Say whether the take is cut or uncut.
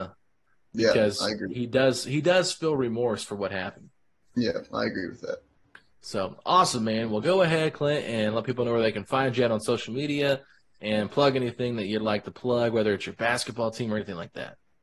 uncut